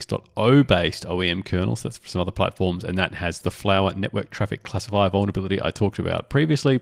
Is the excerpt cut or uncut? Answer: uncut